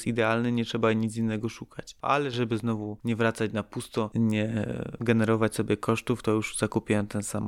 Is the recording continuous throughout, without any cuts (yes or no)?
no